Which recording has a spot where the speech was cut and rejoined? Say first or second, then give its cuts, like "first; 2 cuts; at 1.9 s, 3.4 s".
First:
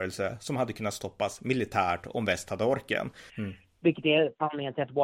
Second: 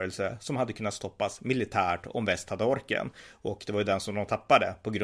first; 1 cut; at 3.3 s